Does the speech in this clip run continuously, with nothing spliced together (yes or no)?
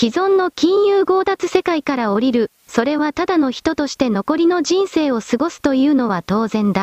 no